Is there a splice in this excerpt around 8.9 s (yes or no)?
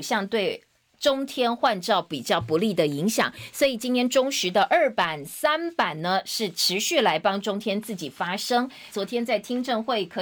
yes